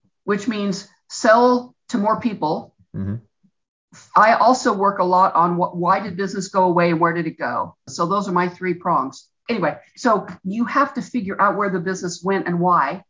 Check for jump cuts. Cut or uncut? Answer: cut